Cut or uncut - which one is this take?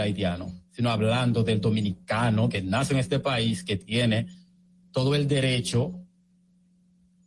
cut